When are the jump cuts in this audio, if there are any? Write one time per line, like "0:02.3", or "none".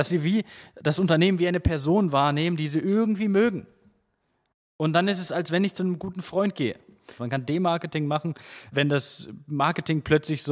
0:07.2
0:08.7